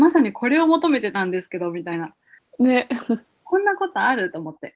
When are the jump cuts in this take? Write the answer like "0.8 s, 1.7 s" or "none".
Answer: 2.4 s